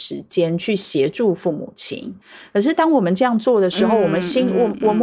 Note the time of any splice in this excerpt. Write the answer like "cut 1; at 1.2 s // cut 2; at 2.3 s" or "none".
none